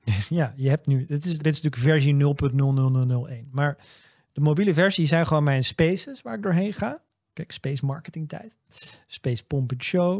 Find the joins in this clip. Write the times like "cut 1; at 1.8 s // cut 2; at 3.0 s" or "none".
cut 1; at 1.4 s // cut 2; at 7.2 s

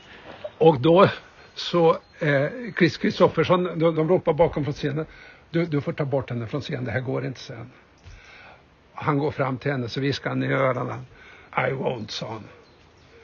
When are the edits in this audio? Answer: cut 1; at 3.9 s // cut 2; at 11.5 s

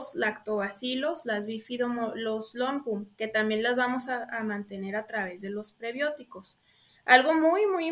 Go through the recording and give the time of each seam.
cut 1; at 6.9 s

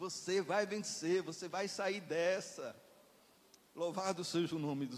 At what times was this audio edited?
none

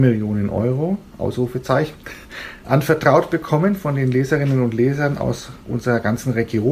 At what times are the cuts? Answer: cut 1; at 1.1 s // cut 2; at 2.6 s

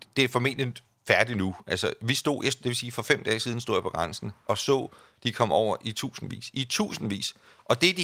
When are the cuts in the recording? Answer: cut 1; at 2.6 s

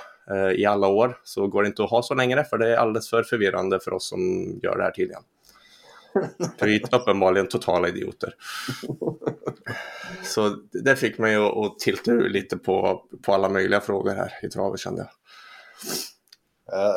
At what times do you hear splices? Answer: none

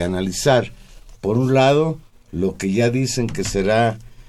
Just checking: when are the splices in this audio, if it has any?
none

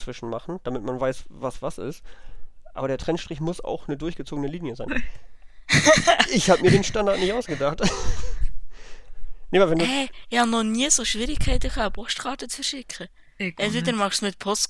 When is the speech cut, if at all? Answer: cut 1; at 4.9 s

